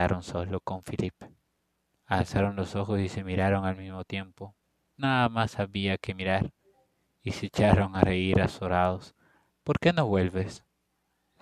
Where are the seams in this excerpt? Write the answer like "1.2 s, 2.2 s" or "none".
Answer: 5.0 s, 9.5 s